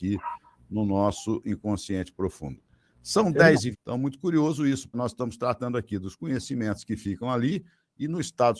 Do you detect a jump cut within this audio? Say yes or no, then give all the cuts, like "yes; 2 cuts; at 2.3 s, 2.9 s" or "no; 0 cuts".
yes; 2 cuts; at 3.7 s, 4.9 s